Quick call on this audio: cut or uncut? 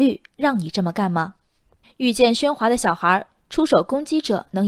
cut